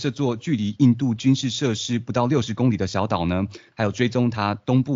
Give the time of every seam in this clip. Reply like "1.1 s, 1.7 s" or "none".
3.7 s